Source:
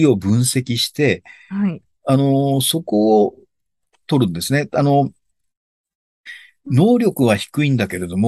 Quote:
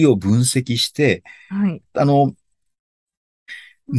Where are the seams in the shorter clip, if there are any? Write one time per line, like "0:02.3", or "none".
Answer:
0:01.9